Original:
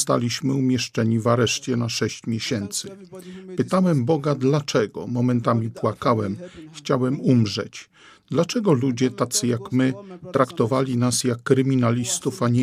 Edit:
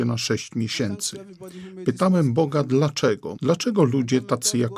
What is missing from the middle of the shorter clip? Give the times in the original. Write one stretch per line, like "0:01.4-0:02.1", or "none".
0:05.1-0:08.2